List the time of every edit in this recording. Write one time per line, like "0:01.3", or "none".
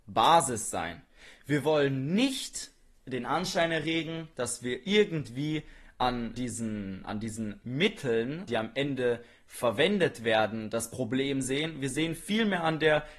0:06.3
0:08.5